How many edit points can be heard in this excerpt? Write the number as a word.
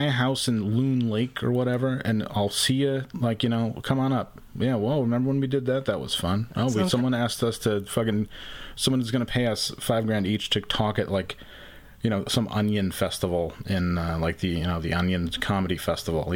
zero